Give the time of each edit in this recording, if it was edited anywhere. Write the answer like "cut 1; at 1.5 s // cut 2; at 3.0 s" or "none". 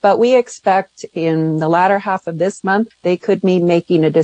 cut 1; at 2.9 s

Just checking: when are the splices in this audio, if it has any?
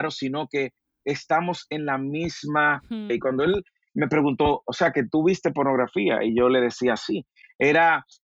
cut 1; at 3.1 s

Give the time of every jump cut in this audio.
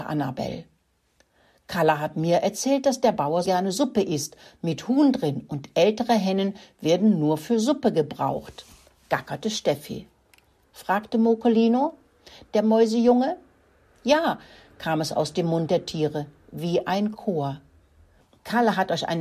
cut 1; at 3.4 s // cut 2; at 10.6 s

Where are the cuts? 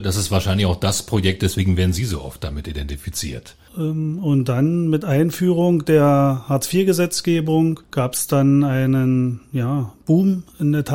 cut 1; at 1.4 s // cut 2; at 3.7 s // cut 3; at 7.8 s

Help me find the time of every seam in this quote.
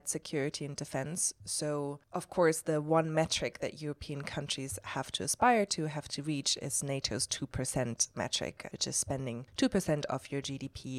cut 1; at 8.7 s

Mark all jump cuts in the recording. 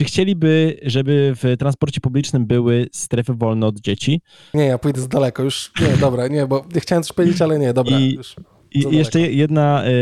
cut 1; at 4.5 s

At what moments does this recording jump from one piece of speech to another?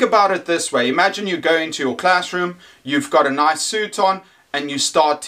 none

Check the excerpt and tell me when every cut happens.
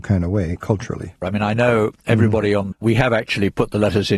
cut 1; at 1.2 s // cut 2; at 2.7 s

